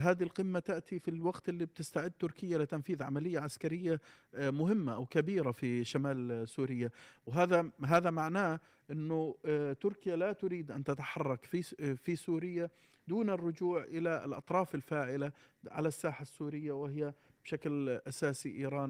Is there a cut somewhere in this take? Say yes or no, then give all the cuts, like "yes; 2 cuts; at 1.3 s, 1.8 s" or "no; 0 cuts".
no; 0 cuts